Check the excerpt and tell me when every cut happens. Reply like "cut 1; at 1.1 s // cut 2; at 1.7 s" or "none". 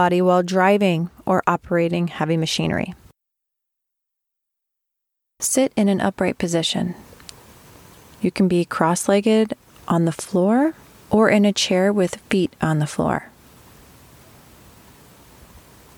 none